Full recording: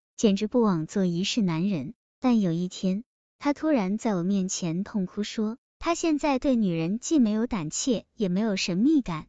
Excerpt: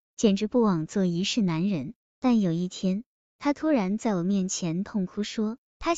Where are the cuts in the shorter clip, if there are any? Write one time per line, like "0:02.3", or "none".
none